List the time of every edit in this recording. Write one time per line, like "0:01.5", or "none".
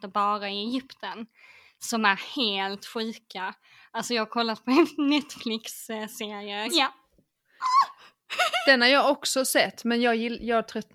0:06.7